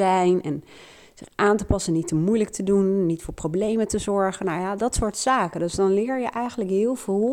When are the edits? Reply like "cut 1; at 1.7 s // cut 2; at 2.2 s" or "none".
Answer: none